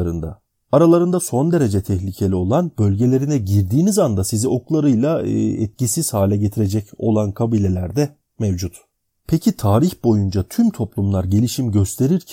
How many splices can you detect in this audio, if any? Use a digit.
0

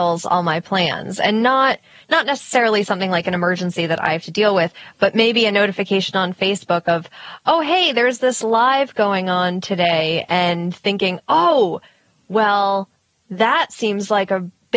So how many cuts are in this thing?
0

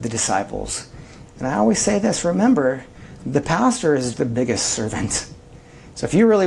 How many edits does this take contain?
2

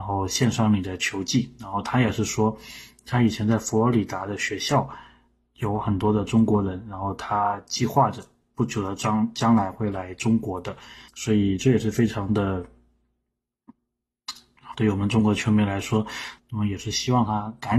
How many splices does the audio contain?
3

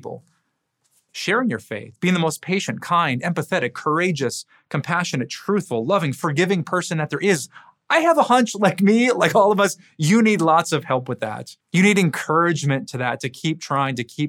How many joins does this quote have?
1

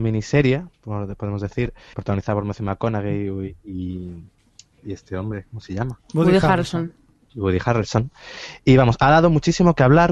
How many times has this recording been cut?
1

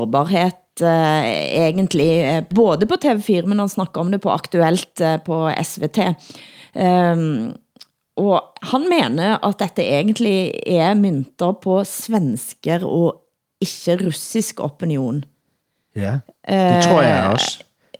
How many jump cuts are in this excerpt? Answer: 0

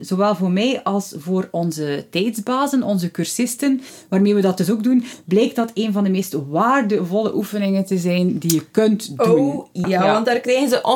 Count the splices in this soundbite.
1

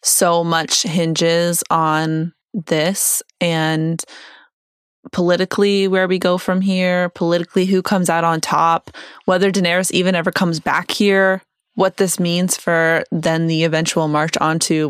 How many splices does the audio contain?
1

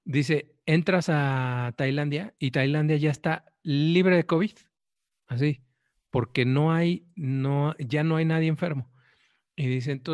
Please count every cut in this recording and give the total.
0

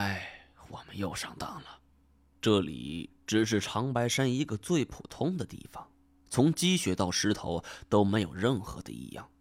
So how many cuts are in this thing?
1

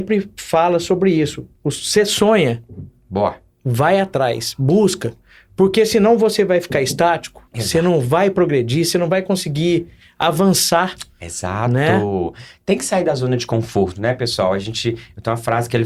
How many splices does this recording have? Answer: 2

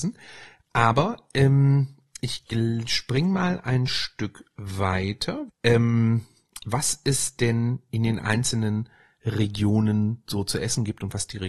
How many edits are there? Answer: 1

